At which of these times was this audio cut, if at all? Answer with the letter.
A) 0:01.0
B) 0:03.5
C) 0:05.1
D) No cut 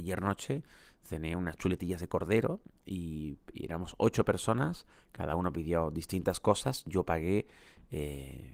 D